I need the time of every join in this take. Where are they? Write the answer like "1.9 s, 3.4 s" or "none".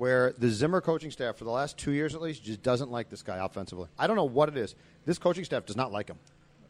4.0 s